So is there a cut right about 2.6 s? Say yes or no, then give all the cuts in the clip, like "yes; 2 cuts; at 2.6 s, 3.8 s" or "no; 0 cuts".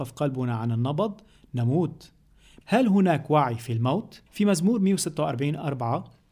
yes; 2 cuts; at 2.6 s, 4.3 s